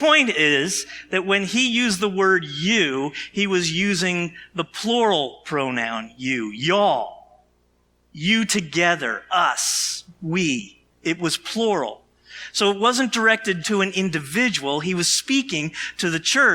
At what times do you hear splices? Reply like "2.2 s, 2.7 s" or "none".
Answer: 10.9 s, 13.6 s